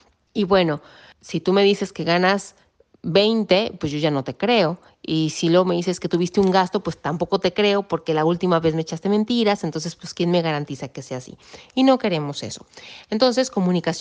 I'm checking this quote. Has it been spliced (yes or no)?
no